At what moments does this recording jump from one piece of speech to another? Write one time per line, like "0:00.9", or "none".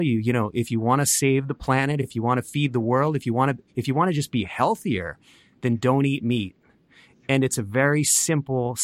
none